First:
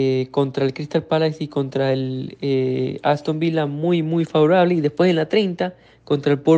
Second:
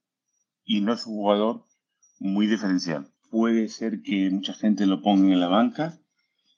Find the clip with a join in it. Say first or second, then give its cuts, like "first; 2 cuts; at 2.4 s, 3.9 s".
second; 1 cut; at 3.2 s